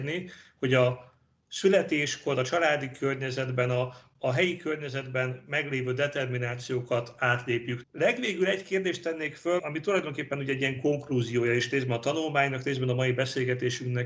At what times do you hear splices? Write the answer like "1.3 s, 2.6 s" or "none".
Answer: 7.8 s, 9.6 s